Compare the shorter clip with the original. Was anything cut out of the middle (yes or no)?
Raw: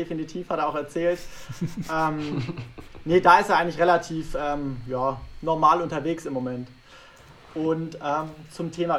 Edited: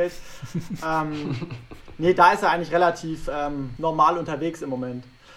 yes